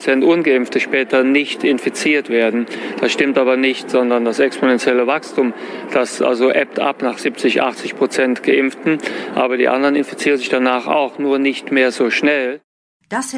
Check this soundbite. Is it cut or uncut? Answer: uncut